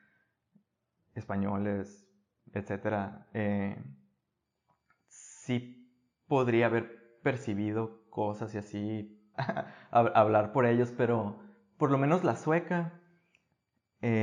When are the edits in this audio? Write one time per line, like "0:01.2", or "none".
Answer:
0:09.3